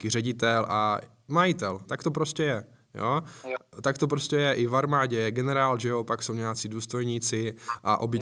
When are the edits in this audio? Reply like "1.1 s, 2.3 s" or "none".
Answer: 1.8 s